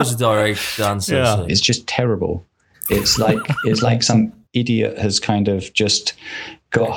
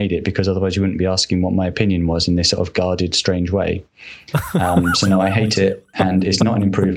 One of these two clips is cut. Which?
first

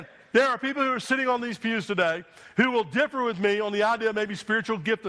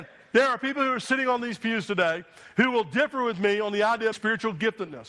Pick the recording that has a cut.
second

